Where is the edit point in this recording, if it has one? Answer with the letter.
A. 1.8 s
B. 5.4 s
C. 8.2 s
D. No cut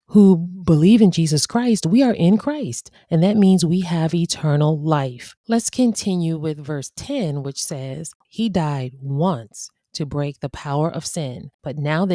C